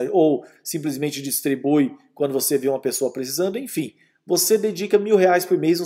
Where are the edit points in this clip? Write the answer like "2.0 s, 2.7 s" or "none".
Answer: none

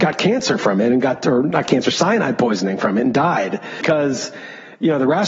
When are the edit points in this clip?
none

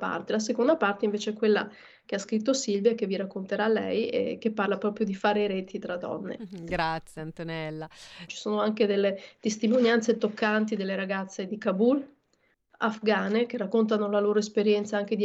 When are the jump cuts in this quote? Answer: 6.4 s, 8.3 s, 11.5 s

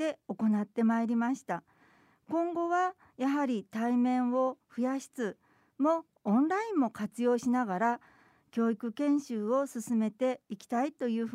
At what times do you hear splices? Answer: 5.1 s

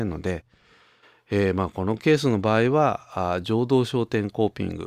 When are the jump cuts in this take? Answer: none

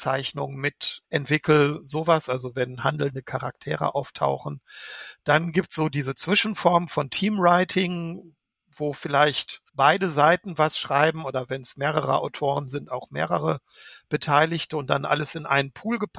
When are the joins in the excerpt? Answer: 1.0 s, 9.7 s

